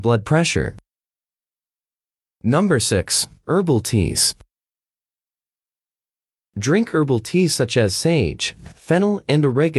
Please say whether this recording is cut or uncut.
uncut